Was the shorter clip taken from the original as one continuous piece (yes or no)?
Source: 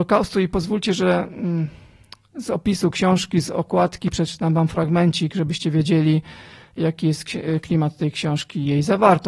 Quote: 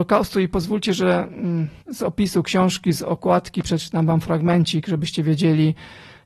no